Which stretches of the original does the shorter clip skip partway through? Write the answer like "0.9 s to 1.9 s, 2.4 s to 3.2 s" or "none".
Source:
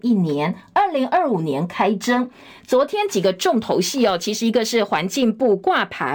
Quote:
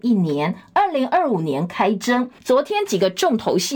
2.4 s to 2.6 s